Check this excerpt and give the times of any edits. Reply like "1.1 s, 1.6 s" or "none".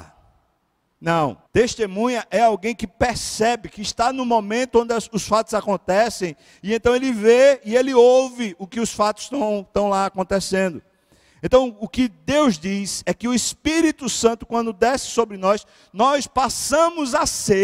1.5 s